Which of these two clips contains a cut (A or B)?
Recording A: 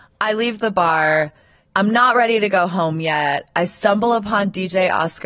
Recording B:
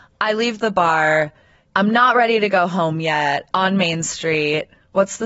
B